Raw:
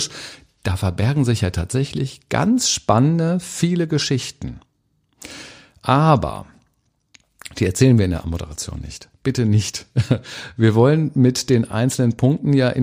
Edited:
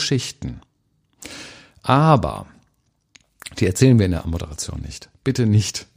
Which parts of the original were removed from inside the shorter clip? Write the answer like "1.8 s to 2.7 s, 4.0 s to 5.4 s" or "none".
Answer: none